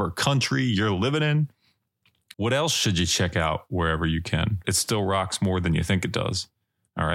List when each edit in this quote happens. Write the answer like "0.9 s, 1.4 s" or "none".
2.3 s, 4.6 s